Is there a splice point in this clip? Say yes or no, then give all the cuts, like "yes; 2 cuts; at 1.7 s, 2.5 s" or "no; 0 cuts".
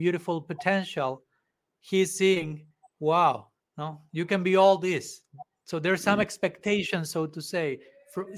no; 0 cuts